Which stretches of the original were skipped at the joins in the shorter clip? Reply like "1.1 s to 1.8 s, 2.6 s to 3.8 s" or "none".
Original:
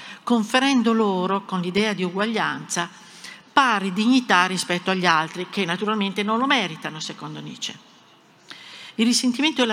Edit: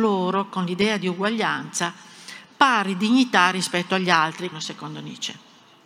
5.5 s to 6.9 s